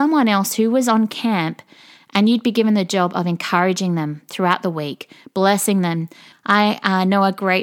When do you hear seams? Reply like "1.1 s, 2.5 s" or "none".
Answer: 6.3 s